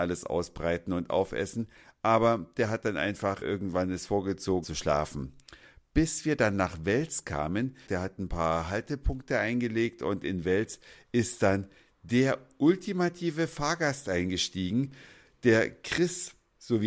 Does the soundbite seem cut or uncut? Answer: cut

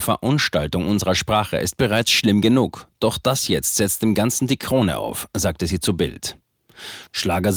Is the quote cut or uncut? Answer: uncut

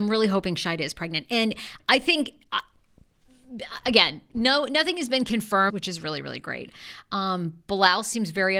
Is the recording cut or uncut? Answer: cut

